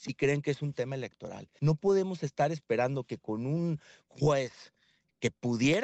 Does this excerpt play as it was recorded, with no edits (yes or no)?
no